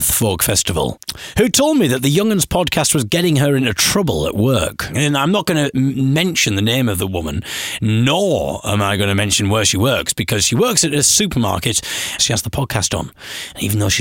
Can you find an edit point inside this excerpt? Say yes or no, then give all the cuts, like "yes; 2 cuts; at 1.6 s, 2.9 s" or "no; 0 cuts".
yes; 1 cut; at 12.2 s